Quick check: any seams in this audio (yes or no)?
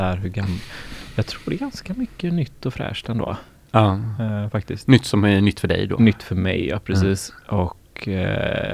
no